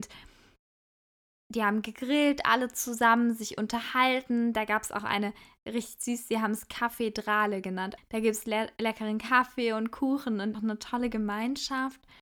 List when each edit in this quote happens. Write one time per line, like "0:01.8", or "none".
0:08.0
0:10.5